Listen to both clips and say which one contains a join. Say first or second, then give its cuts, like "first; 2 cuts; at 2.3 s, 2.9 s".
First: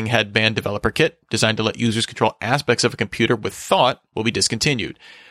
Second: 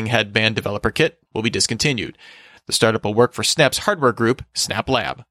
second; 1 cut; at 1.3 s